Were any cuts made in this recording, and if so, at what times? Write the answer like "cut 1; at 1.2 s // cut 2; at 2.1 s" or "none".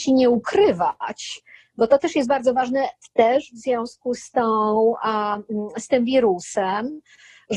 none